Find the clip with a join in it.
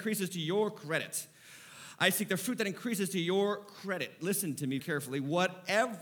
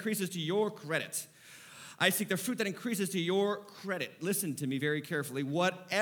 first; 1 cut; at 4.8 s

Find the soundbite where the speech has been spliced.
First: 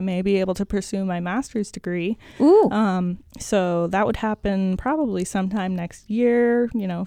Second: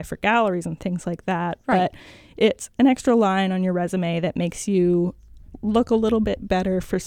first; 1 cut; at 3.3 s

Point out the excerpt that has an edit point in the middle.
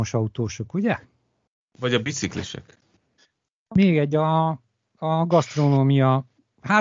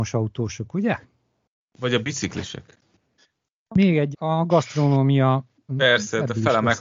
second; 2 cuts; at 4.1 s, 5.7 s

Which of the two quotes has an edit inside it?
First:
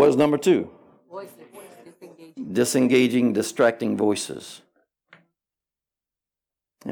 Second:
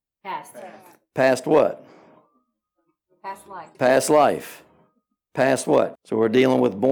second; 2 cuts; at 3.7 s, 6.0 s

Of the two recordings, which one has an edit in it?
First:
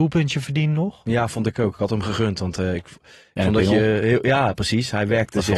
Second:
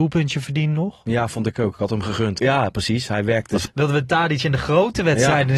second; 2 cuts; at 2.4 s, 3.7 s

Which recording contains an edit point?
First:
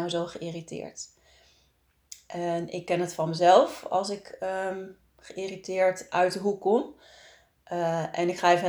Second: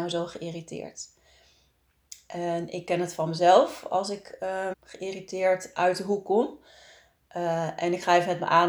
second; 1 cut; at 4.7 s

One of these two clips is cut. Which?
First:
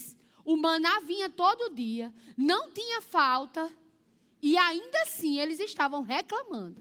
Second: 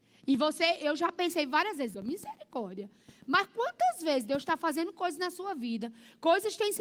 second; 1 cut; at 1.9 s

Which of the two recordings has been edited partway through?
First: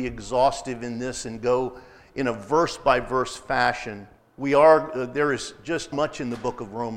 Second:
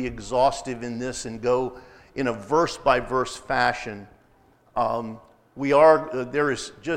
first; 2 cuts; at 4.2 s, 5.9 s

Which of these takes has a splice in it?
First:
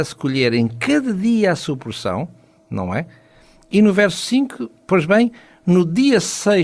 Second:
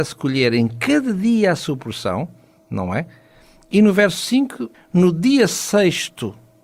second; 1 cut; at 4.7 s

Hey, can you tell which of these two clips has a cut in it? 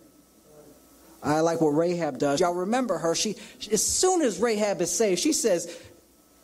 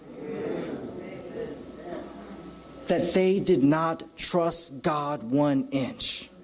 first; 1 cut; at 2.4 s

